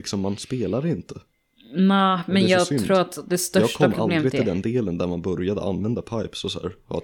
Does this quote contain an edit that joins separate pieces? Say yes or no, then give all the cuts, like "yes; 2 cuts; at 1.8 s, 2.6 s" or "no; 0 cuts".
no; 0 cuts